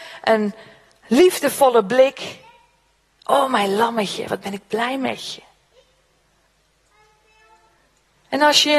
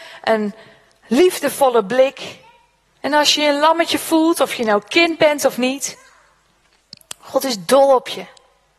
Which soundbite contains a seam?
second; 1 cut; at 2.8 s

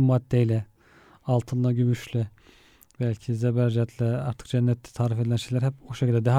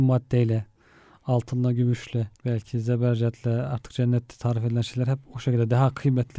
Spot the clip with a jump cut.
second; 1 cut; at 2.4 s

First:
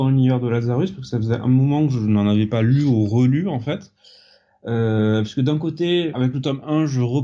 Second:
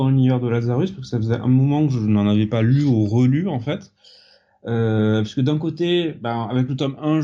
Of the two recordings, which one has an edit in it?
first; 1 cut; at 6.1 s

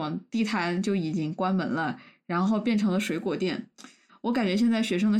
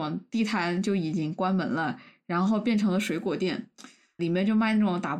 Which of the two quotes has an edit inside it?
first; 1 cut; at 4.1 s

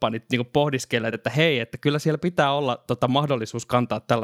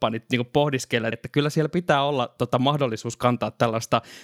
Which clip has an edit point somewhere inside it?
second; 1 cut; at 1.1 s

